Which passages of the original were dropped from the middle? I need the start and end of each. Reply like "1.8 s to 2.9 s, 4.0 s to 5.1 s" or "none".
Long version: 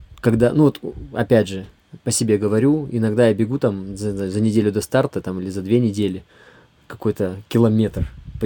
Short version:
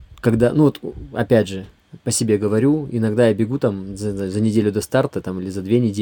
none